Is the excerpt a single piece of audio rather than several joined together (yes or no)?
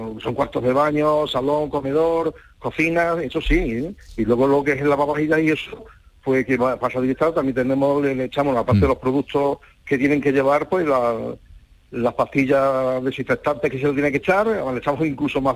yes